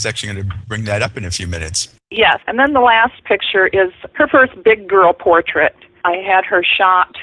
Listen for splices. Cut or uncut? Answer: cut